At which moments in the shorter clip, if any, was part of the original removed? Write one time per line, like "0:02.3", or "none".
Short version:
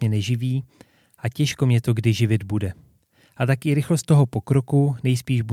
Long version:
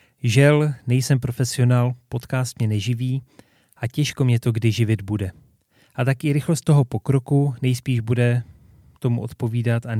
none